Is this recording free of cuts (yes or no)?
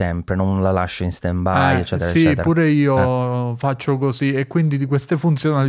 yes